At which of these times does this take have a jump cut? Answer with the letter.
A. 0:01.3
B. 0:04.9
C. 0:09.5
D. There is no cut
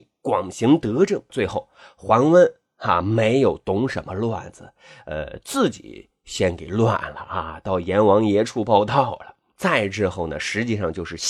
A